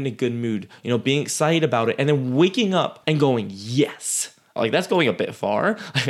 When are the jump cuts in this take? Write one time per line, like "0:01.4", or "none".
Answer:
0:03.0
0:04.6